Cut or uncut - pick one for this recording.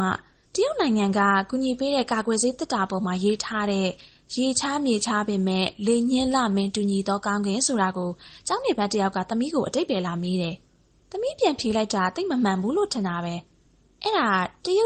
uncut